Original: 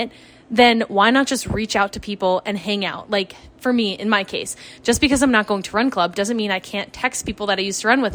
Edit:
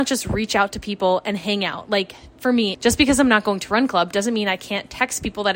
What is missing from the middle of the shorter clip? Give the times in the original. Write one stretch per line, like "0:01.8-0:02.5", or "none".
0:03.9-0:04.8